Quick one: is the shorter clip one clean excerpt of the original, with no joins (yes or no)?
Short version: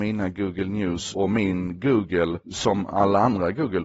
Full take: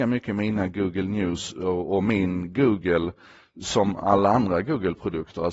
no